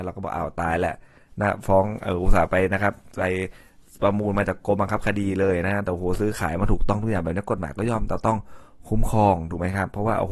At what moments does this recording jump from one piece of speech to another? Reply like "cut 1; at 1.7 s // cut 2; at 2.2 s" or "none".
none